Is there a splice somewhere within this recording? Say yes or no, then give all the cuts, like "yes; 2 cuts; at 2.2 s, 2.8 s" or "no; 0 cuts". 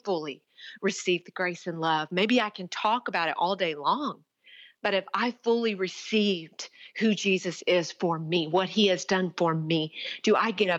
no; 0 cuts